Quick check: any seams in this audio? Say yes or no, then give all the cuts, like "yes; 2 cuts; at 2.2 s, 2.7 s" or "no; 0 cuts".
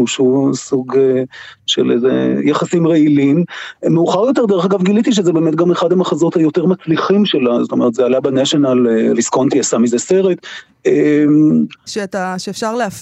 yes; 3 cuts; at 7.9 s, 9.1 s, 11.9 s